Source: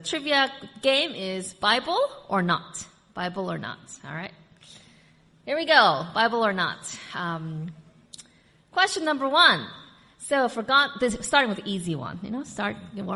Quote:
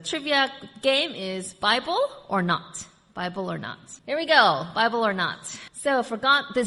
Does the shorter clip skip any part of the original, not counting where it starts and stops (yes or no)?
yes